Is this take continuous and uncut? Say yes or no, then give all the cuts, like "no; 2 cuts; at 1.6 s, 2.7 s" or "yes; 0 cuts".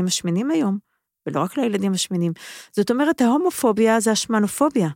yes; 0 cuts